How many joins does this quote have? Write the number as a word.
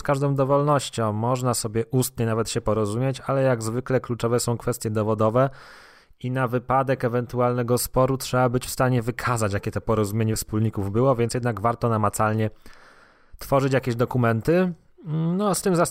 zero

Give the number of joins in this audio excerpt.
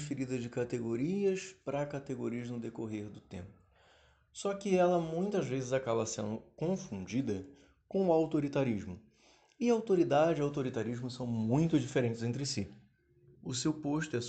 one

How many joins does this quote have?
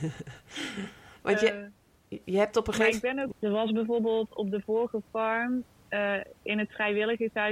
one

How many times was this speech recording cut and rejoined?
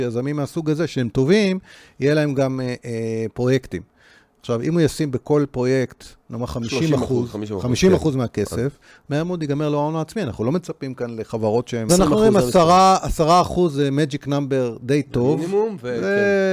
one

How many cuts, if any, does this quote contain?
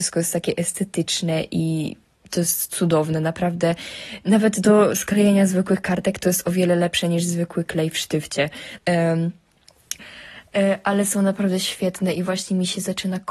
two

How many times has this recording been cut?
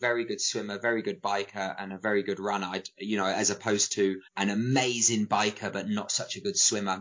one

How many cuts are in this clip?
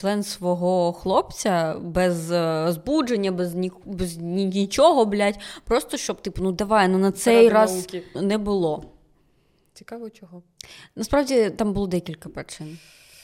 one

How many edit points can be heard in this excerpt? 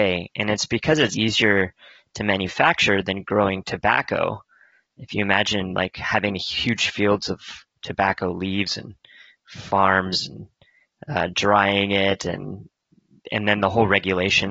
one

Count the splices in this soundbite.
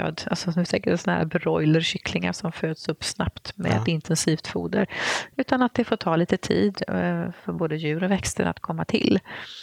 zero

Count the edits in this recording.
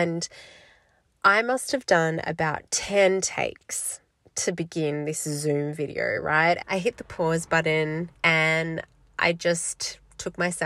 two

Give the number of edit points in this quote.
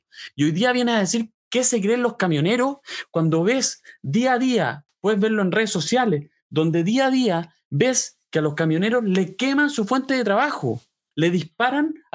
two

